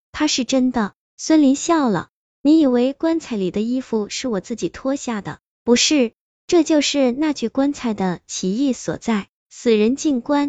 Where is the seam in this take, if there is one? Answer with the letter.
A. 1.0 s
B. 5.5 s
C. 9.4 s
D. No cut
A